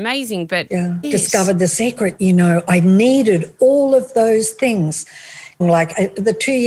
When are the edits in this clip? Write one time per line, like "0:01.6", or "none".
0:01.0
0:05.6